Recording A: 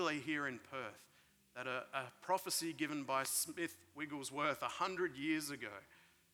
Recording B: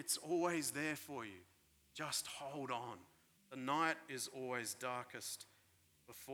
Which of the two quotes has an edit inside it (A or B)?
B